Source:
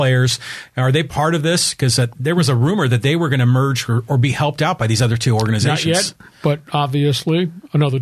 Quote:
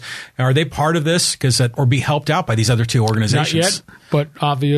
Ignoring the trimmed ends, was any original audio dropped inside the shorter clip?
yes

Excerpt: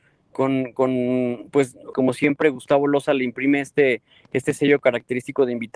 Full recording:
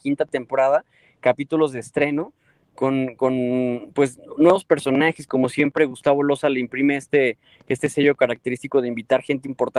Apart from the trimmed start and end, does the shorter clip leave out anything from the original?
yes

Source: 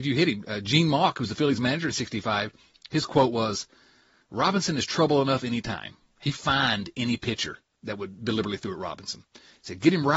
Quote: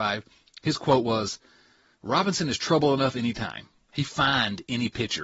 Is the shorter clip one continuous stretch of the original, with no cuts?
yes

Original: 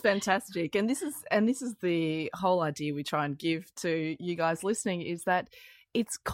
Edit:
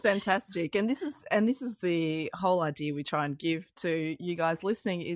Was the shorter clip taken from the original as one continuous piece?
yes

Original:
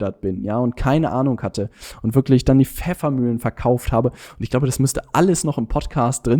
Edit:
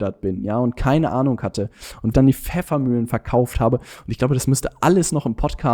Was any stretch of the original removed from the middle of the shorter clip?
yes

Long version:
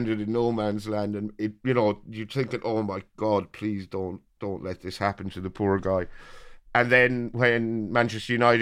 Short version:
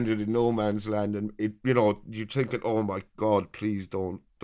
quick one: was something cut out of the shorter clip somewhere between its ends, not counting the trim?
no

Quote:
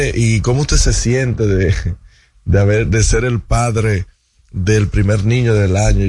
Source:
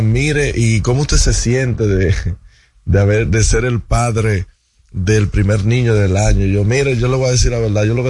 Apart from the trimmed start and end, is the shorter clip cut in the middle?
no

